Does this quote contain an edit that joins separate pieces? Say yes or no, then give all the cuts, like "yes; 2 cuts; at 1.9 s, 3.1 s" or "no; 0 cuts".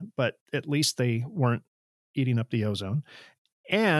no; 0 cuts